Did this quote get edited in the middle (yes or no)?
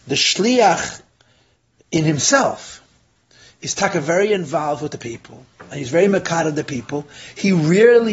no